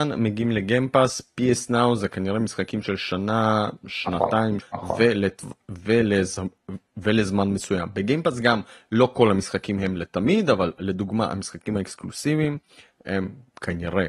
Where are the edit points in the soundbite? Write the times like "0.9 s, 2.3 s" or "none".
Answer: 4.6 s